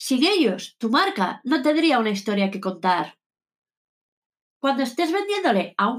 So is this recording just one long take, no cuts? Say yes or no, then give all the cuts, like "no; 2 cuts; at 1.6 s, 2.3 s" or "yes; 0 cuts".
no; 1 cut; at 4.4 s